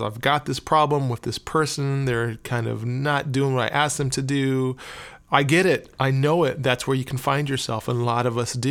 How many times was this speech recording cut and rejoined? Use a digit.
0